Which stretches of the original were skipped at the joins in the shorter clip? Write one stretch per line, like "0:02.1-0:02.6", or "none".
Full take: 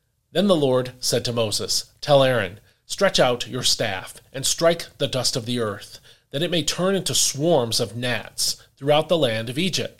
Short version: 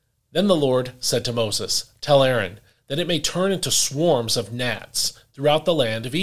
0:02.8-0:06.2